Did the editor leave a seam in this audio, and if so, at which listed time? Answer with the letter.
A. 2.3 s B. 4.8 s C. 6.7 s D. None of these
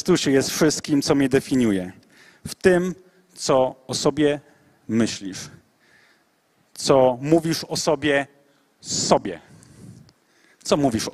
D